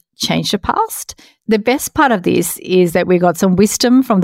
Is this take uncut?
no; 1 cut; at 1.3 s

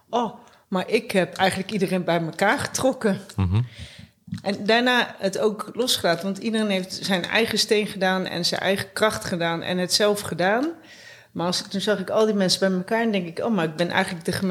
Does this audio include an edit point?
no; 0 cuts

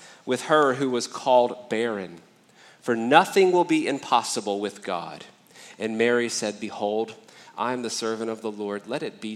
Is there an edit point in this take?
no; 0 cuts

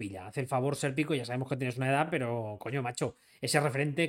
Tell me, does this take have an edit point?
no; 0 cuts

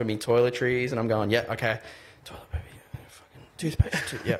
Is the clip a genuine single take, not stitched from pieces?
yes; 0 cuts

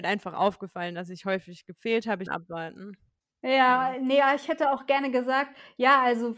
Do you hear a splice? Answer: yes; 1 cut; at 2.3 s

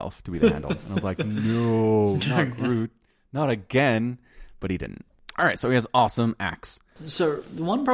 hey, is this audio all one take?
yes; 0 cuts

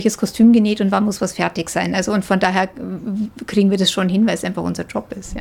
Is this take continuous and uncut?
yes; 0 cuts

